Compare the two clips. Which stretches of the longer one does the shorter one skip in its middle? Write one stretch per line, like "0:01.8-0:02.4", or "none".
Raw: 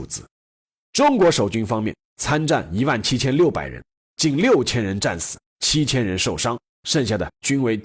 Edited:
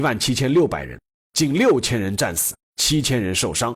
none